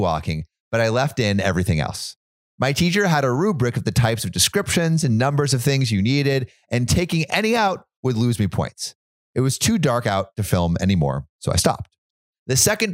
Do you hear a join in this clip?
no; 0 cuts

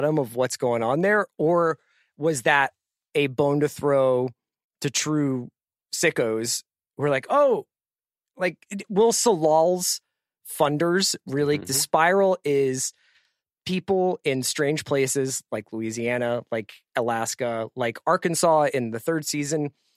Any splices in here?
yes; 1 cut; at 11.6 s

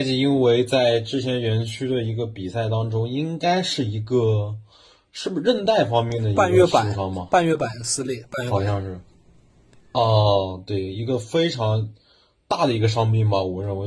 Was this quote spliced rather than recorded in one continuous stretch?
no; 0 cuts

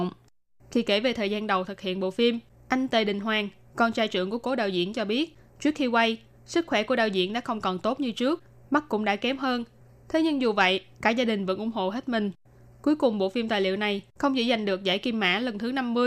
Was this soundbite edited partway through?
no; 0 cuts

